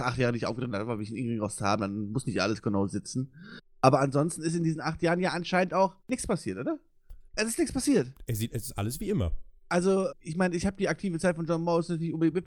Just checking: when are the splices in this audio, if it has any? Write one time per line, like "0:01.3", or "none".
0:06.0
0:07.3
0:10.1